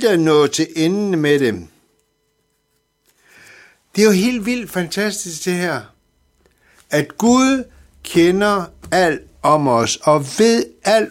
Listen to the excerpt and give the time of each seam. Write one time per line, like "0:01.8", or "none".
none